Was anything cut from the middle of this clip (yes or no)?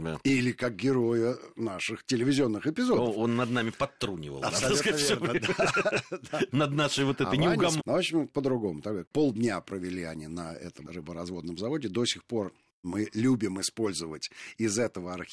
yes